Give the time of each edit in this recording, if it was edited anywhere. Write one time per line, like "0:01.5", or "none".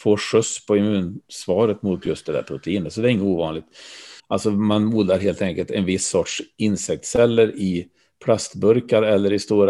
0:04.2